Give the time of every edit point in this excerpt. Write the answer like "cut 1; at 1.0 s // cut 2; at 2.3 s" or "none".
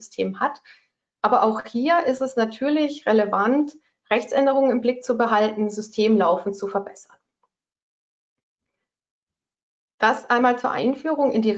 none